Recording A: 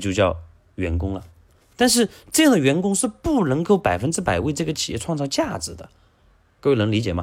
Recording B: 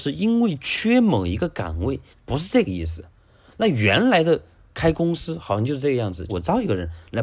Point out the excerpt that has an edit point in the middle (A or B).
B